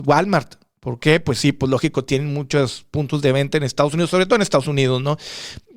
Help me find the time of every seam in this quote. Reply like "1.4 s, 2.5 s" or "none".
none